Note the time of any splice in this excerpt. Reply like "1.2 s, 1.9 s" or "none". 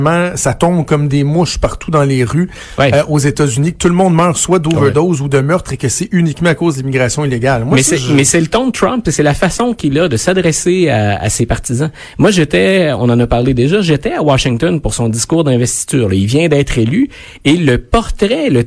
none